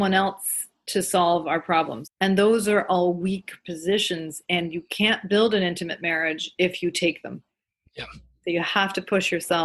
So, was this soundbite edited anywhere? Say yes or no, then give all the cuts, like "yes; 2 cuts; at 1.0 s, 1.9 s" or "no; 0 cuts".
yes; 1 cut; at 2.0 s